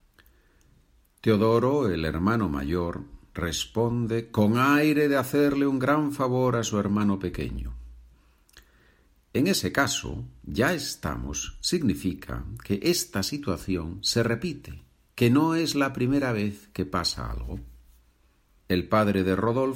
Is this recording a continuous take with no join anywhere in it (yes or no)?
no